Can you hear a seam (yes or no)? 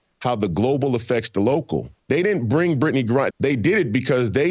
yes